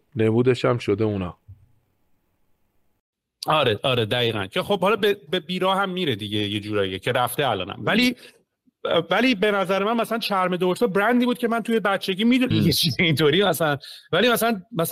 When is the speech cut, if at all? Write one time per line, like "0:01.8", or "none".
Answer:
0:12.5